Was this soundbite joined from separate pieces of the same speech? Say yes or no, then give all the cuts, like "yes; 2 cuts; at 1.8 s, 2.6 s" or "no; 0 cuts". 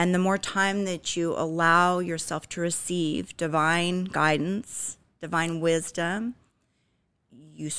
no; 0 cuts